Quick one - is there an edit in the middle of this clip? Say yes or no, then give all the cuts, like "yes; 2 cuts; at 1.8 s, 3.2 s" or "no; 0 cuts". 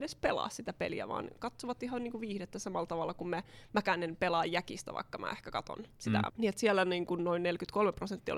yes; 1 cut; at 6.3 s